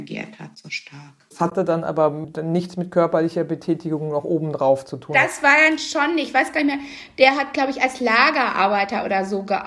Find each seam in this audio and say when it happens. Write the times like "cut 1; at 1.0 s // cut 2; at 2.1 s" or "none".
none